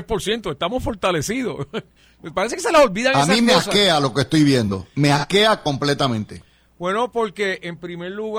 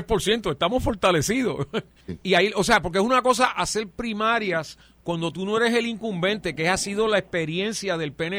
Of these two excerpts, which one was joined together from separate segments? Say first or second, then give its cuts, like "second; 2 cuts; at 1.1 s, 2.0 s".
second; 1 cut; at 2.0 s